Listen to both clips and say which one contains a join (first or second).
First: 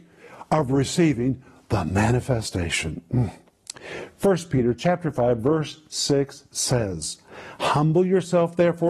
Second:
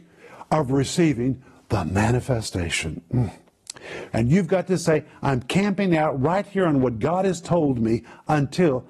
second